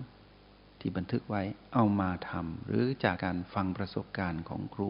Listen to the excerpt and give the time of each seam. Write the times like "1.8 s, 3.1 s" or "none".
3.2 s